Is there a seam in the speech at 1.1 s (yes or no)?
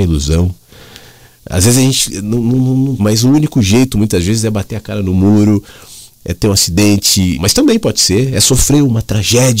no